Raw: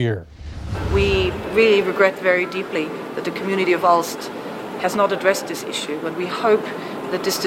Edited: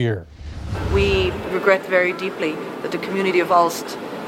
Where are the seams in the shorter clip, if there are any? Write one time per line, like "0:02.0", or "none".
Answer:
0:01.5

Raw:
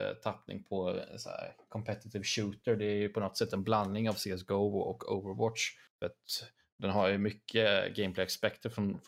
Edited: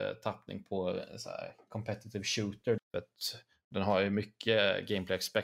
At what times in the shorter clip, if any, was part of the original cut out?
0:02.8

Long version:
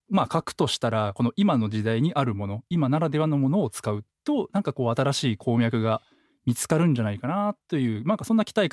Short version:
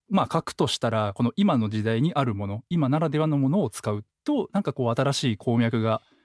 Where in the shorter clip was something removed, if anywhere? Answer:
none

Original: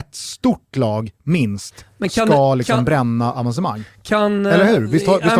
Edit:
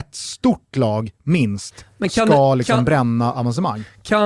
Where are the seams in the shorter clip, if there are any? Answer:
none

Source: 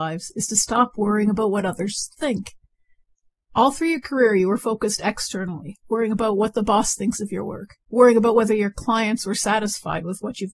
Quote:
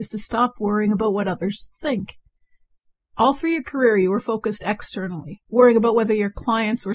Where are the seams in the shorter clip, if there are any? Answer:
0:05.4

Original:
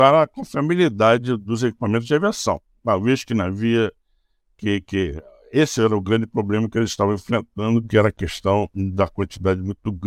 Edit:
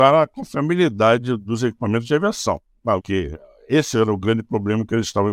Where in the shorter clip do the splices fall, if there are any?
0:03.0

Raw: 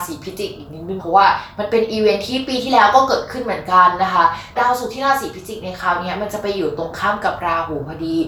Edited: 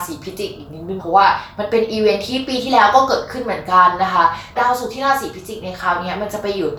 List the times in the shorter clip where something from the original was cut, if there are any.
none

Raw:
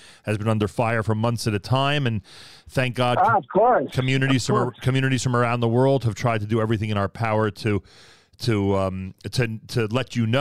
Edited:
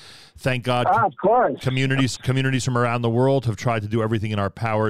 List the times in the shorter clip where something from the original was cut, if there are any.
0:02.2

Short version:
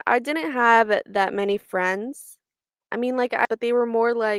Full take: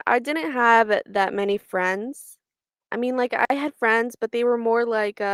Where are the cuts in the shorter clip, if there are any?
0:03.5

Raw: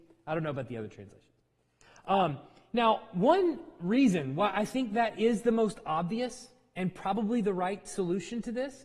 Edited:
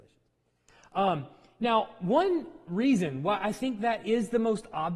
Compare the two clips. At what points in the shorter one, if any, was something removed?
none

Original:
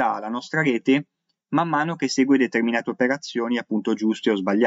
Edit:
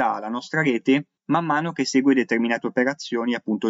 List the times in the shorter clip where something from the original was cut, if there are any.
0:01.2

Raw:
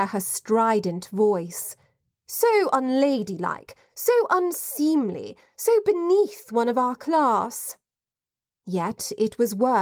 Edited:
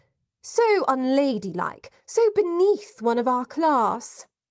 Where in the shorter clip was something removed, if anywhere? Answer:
0:02.0

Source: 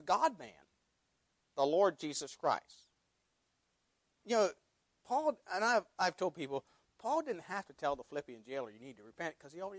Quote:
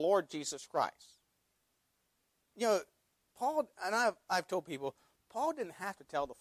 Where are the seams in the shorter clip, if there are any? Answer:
none

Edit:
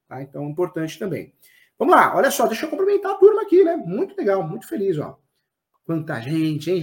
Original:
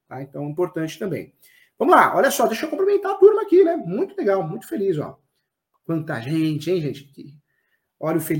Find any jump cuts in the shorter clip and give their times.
none

